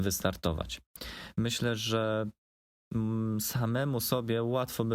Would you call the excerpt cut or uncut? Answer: uncut